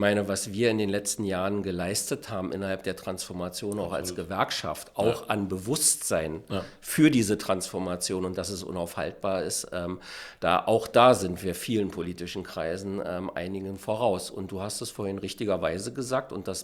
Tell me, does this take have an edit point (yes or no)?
no